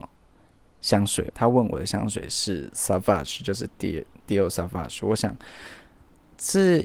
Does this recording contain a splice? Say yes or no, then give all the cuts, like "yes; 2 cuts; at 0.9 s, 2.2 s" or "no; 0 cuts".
yes; 1 cut; at 1.3 s